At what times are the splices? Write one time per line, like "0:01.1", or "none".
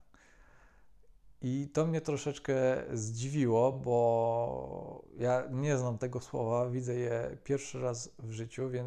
none